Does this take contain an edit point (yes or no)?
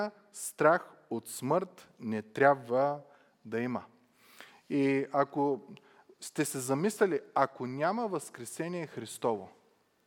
no